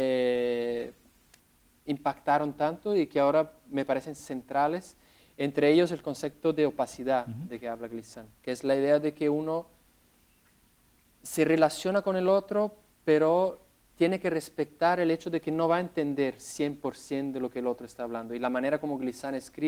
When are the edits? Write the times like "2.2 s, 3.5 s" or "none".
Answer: none